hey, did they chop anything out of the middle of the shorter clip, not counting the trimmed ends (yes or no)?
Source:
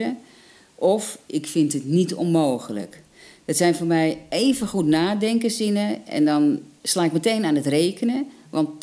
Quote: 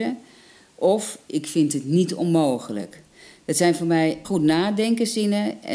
yes